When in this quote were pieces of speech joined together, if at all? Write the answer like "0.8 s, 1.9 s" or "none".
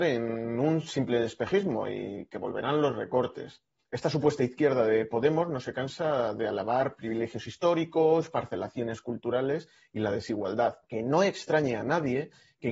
3.8 s, 10.8 s